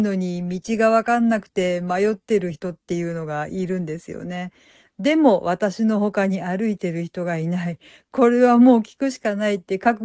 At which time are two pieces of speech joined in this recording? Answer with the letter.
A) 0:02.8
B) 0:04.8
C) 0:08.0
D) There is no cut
B